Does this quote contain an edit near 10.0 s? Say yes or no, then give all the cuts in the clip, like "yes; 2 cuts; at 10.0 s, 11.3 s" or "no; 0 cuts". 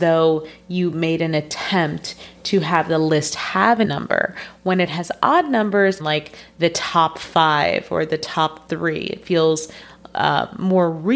no; 2 cuts; at 3.8 s, 6.0 s